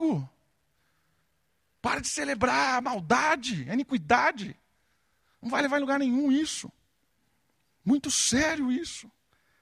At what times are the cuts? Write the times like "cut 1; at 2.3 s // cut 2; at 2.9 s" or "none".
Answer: none